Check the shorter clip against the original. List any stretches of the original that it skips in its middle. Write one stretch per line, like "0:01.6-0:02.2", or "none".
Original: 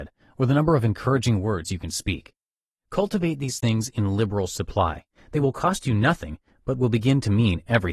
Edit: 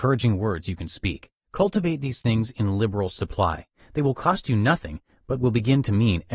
0:02.4-0:02.8